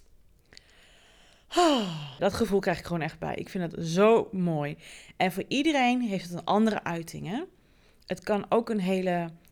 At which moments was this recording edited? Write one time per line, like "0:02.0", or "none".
0:02.2